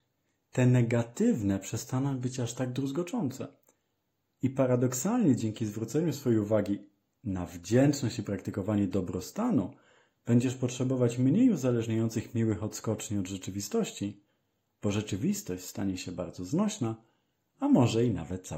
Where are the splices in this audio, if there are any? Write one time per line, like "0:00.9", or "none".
none